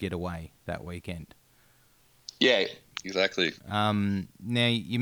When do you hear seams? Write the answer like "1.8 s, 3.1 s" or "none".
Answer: 3.6 s